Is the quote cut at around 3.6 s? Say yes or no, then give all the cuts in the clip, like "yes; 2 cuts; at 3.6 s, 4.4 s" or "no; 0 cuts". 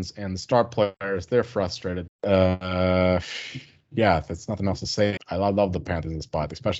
no; 2 cuts; at 2.1 s, 5.2 s